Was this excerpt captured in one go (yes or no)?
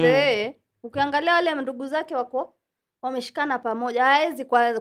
yes